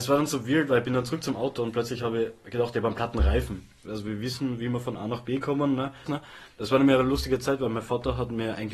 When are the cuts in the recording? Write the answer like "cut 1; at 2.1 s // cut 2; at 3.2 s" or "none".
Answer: cut 1; at 3.8 s // cut 2; at 6.1 s